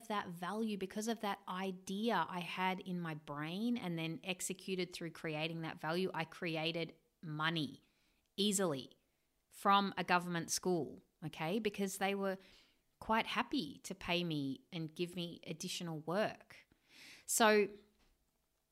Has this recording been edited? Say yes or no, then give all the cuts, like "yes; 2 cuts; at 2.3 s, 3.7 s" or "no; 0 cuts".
no; 0 cuts